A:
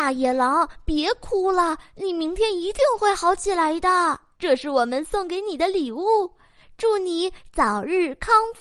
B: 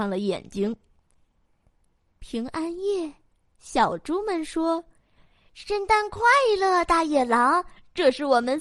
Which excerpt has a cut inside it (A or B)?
A